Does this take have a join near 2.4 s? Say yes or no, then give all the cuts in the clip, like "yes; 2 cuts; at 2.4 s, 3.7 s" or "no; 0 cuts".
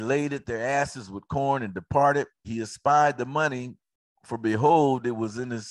yes; 1 cut; at 2.4 s